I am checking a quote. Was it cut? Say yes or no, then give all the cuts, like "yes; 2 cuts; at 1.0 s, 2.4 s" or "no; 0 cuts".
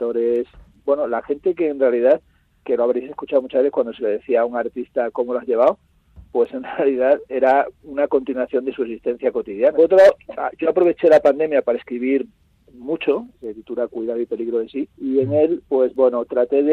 yes; 3 cuts; at 9.7 s, 13.3 s, 14.9 s